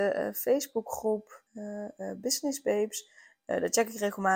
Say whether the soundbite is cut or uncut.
cut